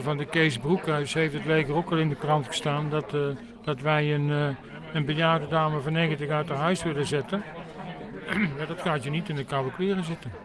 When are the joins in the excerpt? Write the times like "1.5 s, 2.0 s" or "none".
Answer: none